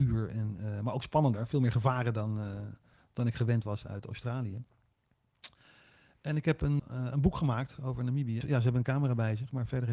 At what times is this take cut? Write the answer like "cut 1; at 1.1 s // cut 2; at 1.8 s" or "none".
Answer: cut 1; at 6.8 s // cut 2; at 8.4 s